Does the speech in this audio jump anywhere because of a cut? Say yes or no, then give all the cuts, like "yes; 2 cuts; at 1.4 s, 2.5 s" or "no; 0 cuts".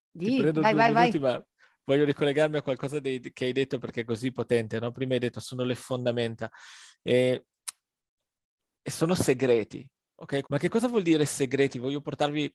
yes; 1 cut; at 10.4 s